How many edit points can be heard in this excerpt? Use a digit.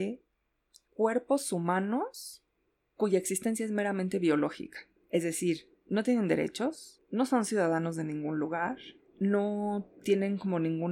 0